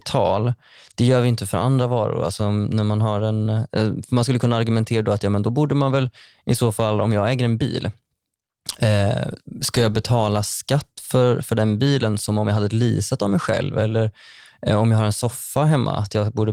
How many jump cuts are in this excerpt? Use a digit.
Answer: 0